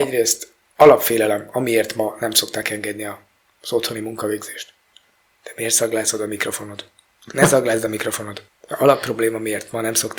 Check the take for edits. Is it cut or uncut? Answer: uncut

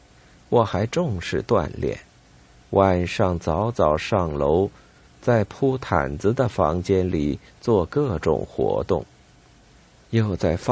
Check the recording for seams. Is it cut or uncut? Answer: uncut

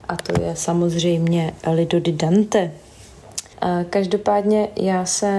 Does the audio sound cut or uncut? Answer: cut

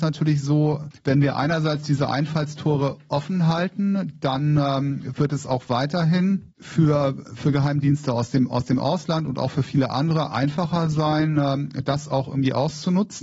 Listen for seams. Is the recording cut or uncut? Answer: uncut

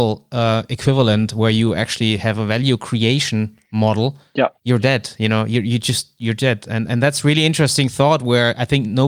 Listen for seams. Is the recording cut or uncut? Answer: uncut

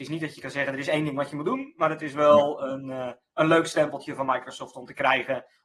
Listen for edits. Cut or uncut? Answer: uncut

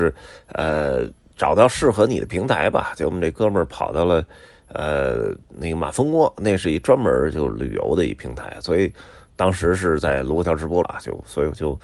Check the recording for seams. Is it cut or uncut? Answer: cut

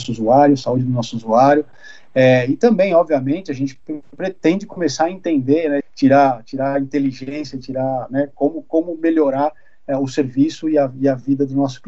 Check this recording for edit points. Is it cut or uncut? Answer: cut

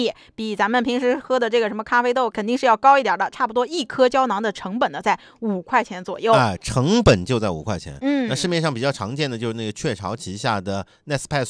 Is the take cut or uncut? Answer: cut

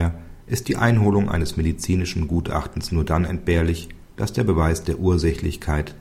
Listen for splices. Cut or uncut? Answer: cut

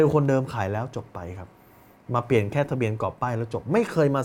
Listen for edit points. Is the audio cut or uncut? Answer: uncut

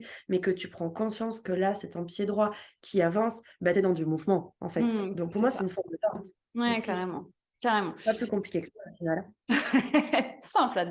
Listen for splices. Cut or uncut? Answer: uncut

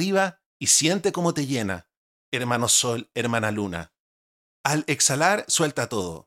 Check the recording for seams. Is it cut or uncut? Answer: uncut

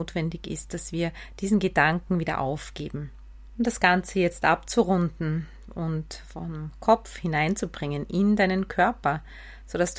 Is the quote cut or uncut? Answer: uncut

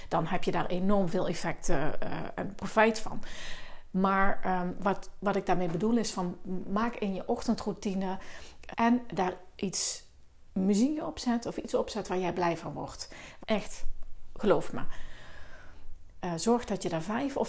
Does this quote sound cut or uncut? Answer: cut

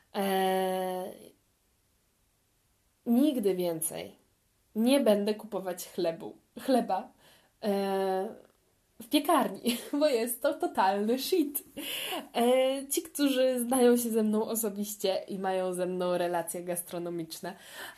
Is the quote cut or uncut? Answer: uncut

